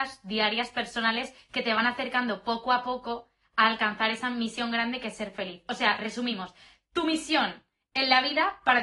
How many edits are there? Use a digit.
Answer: 0